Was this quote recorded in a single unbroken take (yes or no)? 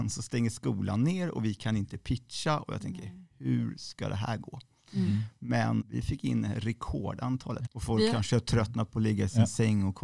no